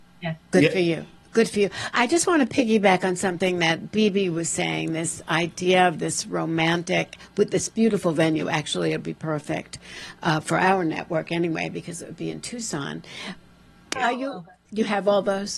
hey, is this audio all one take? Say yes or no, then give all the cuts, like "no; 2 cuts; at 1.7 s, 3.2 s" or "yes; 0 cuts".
no; 1 cut; at 14.0 s